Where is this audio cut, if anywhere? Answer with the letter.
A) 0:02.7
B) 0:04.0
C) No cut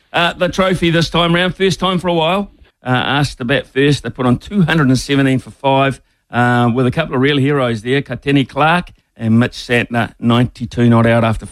A